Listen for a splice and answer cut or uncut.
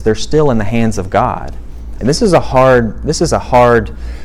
cut